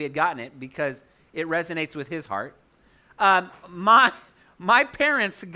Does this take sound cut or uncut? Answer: uncut